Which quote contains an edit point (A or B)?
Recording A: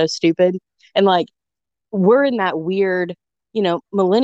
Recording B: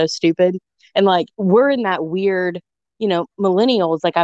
B